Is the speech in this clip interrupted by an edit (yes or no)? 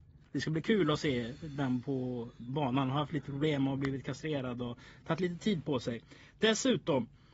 no